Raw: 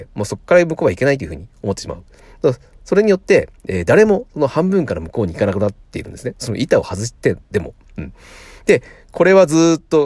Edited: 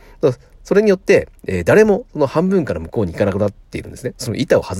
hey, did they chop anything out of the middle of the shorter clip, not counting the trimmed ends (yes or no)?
no